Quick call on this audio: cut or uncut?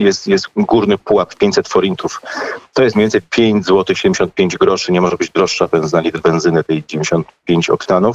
uncut